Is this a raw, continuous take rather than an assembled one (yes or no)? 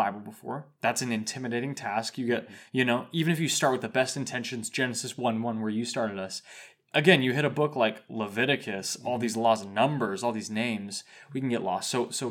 yes